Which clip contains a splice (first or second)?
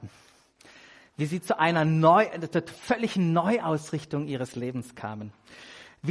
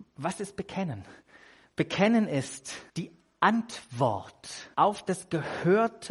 second